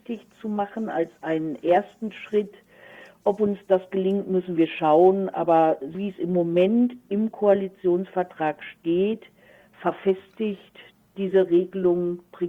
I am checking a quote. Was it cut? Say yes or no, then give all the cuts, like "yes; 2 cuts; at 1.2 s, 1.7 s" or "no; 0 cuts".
yes; 1 cut; at 5.9 s